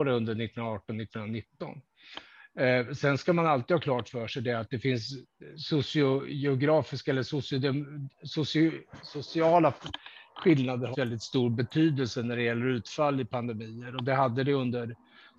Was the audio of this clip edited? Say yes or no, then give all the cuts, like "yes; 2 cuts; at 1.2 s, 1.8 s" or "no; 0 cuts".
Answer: yes; 1 cut; at 10.9 s